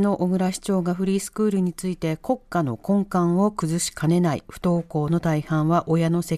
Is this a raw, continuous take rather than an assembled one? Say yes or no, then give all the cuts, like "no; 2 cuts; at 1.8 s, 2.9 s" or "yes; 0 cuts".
yes; 0 cuts